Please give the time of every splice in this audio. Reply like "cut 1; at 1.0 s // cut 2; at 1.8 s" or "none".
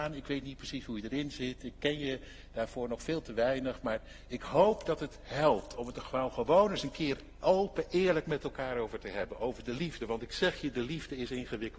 none